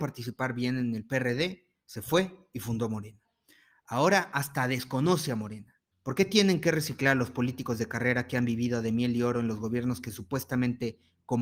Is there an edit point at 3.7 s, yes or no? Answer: no